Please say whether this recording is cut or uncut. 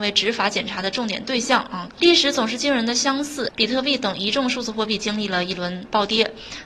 cut